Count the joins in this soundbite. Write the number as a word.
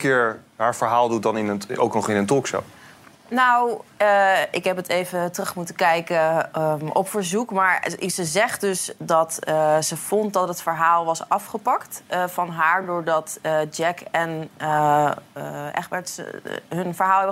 zero